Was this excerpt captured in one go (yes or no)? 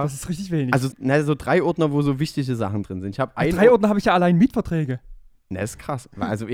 no